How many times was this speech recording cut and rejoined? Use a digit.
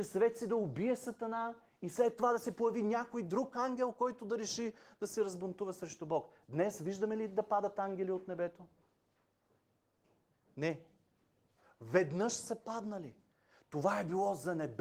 0